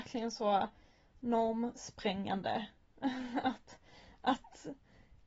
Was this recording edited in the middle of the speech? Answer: no; 0 cuts

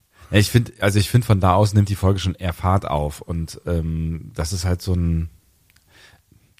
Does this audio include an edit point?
no; 0 cuts

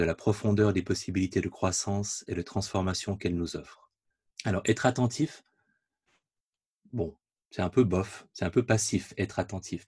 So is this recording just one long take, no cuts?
no; 1 cut; at 4.3 s

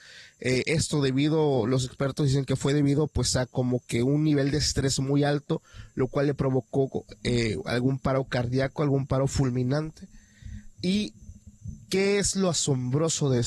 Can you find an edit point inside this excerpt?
no; 0 cuts

